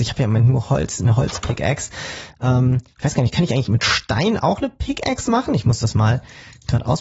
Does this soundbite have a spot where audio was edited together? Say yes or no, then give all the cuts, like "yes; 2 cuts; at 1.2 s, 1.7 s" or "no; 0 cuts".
no; 0 cuts